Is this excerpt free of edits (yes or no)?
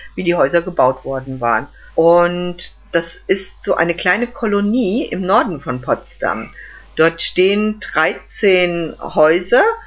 no